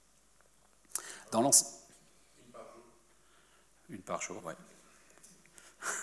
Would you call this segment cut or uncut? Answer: cut